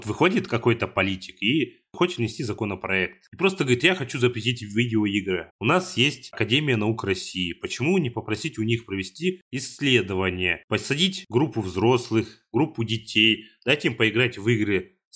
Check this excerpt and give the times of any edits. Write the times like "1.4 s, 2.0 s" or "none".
5.5 s